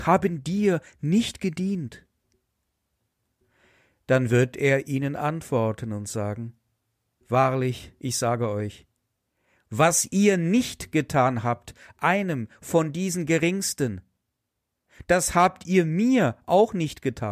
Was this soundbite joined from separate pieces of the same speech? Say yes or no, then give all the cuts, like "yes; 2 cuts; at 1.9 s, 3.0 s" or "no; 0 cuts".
no; 0 cuts